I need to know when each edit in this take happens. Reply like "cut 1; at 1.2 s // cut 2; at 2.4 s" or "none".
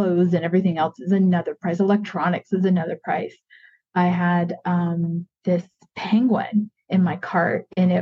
none

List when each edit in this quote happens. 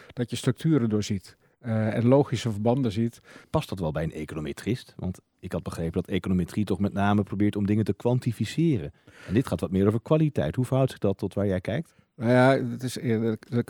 cut 1; at 3.4 s

